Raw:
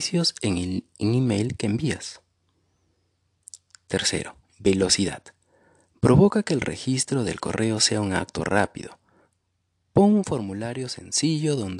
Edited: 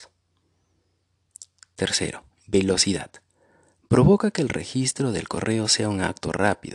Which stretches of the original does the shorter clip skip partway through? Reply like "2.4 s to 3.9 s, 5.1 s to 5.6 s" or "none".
none